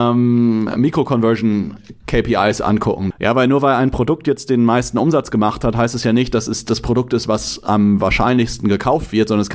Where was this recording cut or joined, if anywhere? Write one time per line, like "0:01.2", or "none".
0:03.1